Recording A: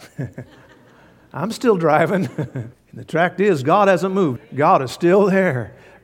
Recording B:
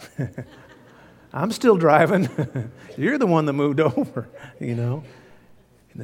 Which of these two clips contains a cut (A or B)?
A